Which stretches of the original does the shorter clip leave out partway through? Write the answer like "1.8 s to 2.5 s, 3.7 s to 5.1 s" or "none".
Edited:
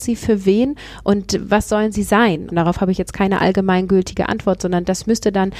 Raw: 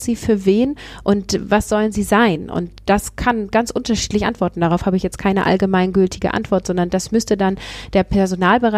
2.5 s to 4.5 s